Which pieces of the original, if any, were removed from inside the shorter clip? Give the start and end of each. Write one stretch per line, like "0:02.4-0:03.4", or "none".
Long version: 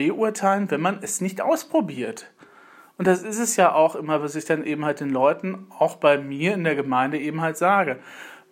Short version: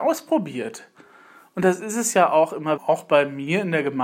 0:04.2-0:05.7